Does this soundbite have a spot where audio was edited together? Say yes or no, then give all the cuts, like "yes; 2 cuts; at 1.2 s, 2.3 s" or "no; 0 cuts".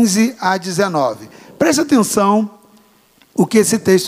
no; 0 cuts